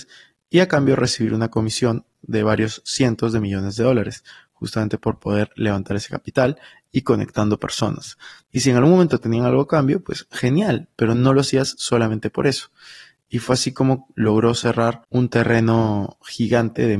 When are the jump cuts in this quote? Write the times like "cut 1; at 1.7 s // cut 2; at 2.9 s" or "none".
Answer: cut 1; at 8.4 s // cut 2; at 15.0 s